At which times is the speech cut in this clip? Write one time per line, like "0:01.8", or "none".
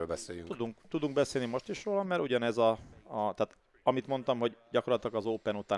none